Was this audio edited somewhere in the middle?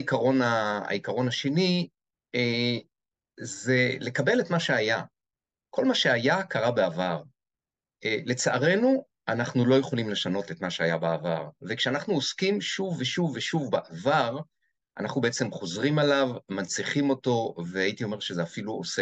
no; 0 cuts

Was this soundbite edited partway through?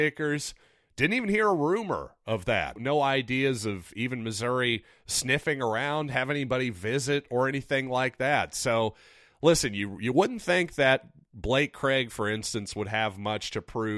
yes; 1 cut; at 2.8 s

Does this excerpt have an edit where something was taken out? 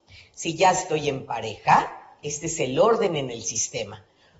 no; 0 cuts

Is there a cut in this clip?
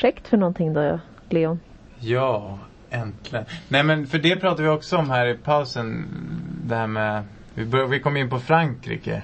no; 0 cuts

